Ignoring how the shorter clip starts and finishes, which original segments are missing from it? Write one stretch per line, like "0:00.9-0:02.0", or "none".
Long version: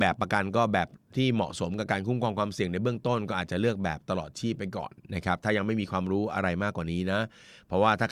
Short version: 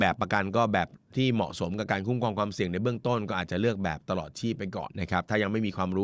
0:04.9-0:05.0